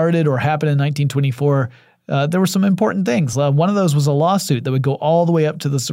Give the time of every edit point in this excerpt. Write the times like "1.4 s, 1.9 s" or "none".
none

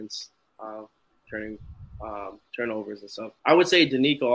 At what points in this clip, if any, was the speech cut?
3.4 s

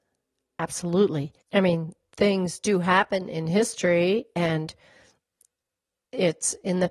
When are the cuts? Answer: 1.4 s

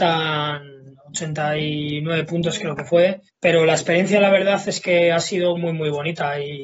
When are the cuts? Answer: 3.3 s, 5.6 s

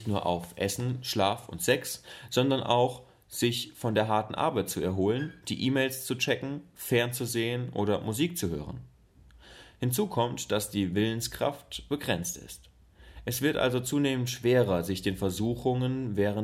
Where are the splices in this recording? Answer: none

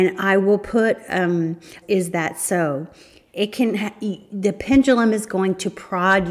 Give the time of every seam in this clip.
1.8 s, 3.3 s

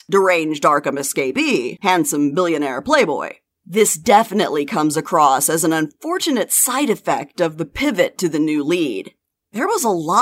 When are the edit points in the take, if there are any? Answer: 1.8 s, 3.5 s

